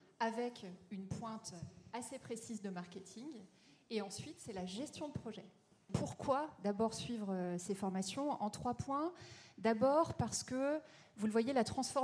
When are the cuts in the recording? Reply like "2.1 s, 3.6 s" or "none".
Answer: none